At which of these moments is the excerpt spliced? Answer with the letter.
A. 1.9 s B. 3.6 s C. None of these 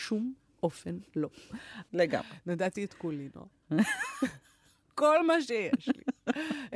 A